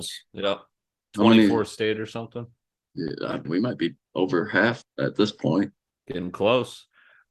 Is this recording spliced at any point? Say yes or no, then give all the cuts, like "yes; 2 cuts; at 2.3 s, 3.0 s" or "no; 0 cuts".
yes; 2 cuts; at 3.5 s, 4.8 s